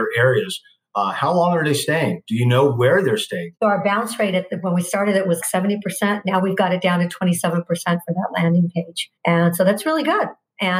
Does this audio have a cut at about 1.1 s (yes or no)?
no